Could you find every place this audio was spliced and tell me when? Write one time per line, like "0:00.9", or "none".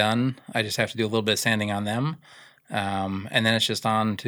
none